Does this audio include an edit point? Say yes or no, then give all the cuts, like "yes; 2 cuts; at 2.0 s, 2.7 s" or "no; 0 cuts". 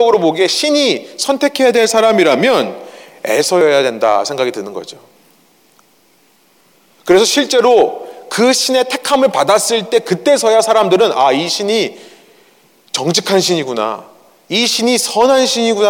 no; 0 cuts